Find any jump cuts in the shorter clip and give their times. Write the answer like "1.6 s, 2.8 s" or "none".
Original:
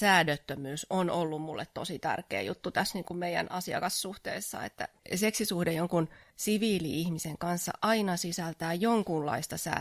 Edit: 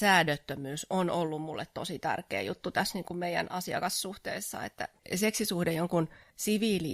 none